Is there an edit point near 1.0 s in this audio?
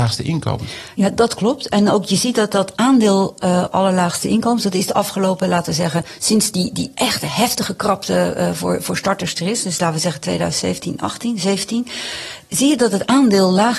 no; 0 cuts

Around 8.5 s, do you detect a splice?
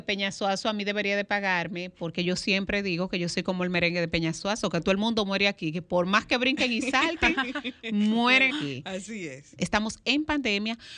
yes; 2 cuts; at 8.5 s, 9.6 s

